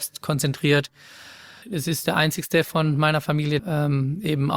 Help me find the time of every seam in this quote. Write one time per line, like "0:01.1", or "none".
0:01.6
0:03.6